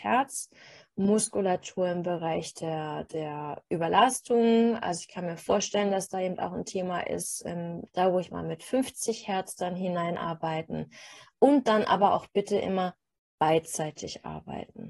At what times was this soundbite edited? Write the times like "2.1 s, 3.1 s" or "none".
7.9 s